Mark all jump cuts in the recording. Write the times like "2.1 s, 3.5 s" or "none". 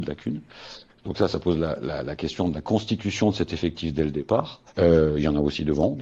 4.7 s